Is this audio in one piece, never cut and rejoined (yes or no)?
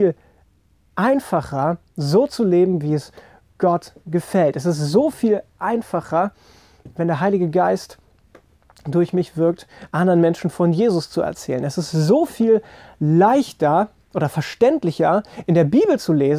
yes